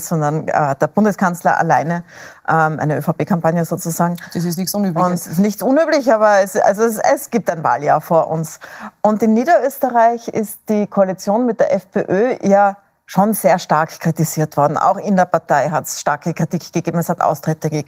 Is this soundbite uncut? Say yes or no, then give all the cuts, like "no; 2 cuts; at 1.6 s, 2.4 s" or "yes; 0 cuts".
yes; 0 cuts